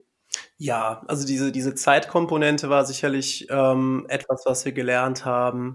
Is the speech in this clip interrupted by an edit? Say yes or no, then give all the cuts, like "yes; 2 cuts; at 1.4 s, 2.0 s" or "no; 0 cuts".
no; 0 cuts